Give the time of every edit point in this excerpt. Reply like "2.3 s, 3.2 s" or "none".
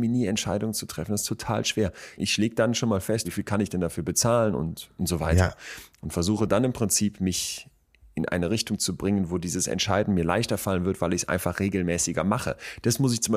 2.2 s, 3.2 s

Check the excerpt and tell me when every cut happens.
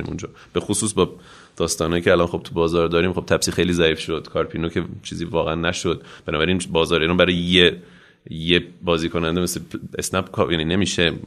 none

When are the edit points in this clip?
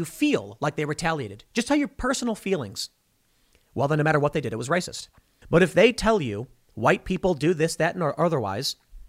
5.4 s

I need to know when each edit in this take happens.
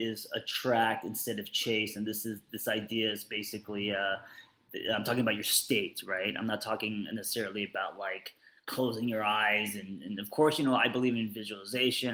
none

